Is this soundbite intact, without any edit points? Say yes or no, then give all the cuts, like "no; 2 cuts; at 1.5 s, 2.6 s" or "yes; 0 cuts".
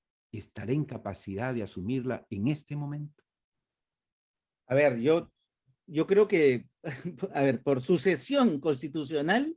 yes; 0 cuts